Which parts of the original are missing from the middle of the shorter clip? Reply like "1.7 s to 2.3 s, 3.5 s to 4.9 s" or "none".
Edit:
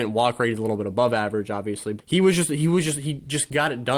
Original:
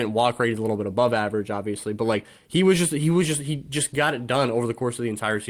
2.0 s to 2.4 s